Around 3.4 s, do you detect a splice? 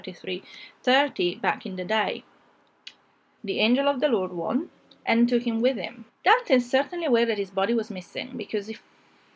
yes; 2 cuts; at 3.4 s, 6.1 s

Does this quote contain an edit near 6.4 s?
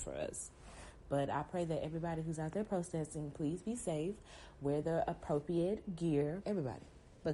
yes; 1 cut; at 6.4 s

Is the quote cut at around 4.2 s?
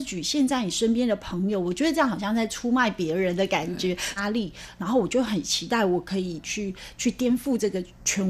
yes; 1 cut; at 4.2 s

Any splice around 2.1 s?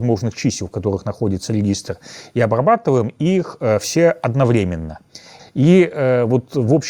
no; 1 cut; at 5.4 s

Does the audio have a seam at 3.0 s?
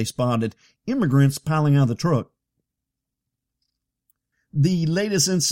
no; 1 cut; at 4.3 s

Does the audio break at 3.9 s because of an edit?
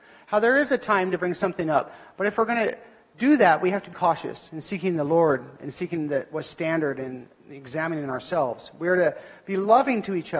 yes; 1 cut; at 3.9 s

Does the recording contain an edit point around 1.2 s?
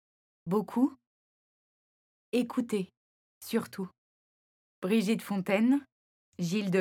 no; 0 cuts

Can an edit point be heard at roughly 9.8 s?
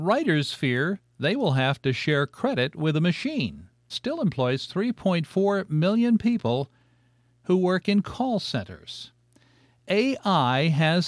no; 1 cut; at 3.9 s

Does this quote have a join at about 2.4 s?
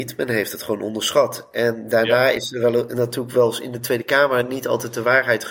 no; 0 cuts

